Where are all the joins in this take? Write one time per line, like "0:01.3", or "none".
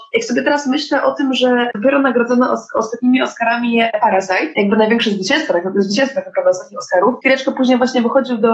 none